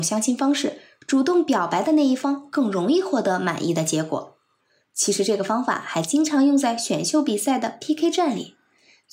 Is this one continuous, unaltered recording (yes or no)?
yes